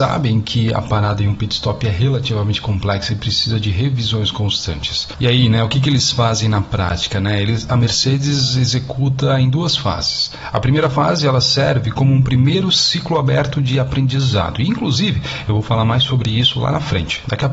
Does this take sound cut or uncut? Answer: uncut